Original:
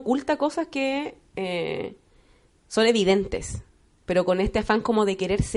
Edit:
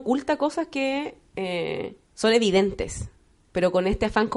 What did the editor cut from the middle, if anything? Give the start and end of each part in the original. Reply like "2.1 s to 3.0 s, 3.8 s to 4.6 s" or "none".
2.0 s to 2.6 s

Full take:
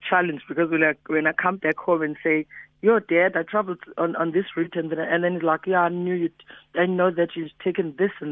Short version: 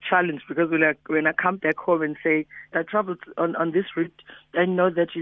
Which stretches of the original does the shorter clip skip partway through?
2.7 s to 3.3 s, 4.7 s to 6.3 s

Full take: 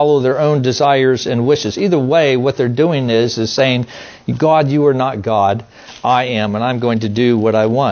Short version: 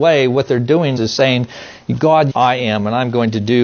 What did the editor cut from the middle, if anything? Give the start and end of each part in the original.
3.0 s to 3.3 s, 4.7 s to 6.0 s

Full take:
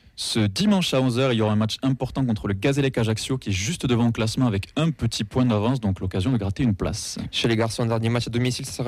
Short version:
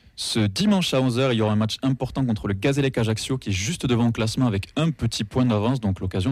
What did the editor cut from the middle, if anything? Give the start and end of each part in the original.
none

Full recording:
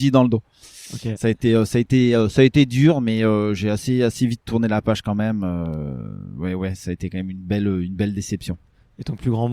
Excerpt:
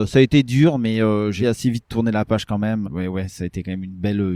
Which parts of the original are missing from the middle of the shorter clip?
3.6 s to 4.0 s, 5.4 s to 6.3 s

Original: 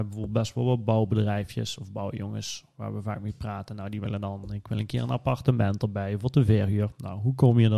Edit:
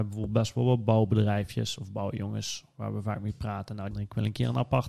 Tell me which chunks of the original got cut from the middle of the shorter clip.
3.9 s to 4.4 s

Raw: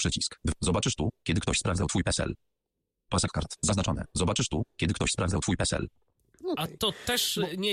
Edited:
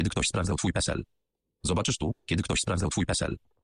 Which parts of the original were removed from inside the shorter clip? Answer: 2.9 s to 4.1 s

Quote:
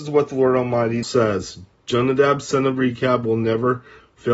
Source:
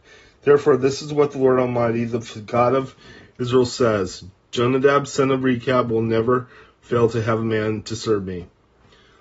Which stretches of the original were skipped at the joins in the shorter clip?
2.1 s to 3.7 s

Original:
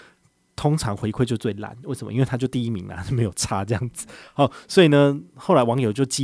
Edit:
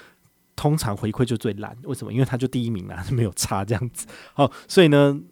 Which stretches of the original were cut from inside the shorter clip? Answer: none

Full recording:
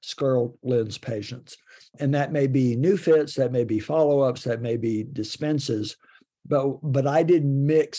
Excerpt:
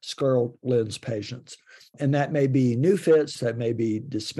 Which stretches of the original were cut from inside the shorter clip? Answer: 3.3 s to 4.4 s

